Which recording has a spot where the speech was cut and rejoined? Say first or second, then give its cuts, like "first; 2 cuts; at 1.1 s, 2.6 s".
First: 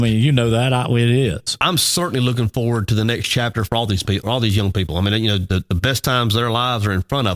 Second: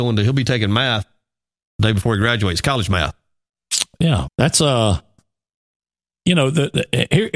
second; 1 cut; at 4.3 s